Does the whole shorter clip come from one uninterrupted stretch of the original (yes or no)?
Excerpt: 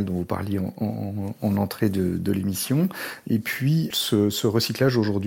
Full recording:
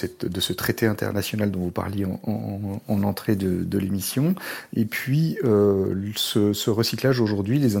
no